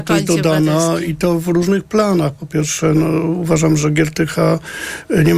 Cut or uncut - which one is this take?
uncut